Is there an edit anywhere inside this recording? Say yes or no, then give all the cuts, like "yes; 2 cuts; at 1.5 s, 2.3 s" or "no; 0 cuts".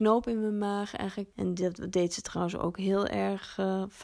yes; 1 cut; at 1.3 s